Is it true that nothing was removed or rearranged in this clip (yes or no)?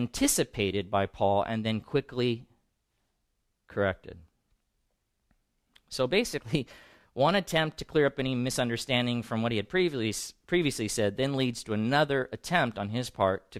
yes